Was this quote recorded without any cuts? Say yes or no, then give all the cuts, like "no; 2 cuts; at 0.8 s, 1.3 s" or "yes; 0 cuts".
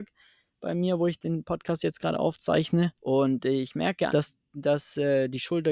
no; 2 cuts; at 3.0 s, 4.1 s